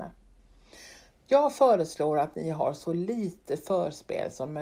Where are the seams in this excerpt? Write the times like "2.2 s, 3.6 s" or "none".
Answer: 1.1 s